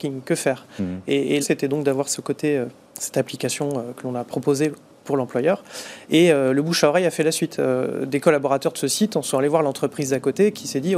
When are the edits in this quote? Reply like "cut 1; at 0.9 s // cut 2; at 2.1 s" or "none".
cut 1; at 1.4 s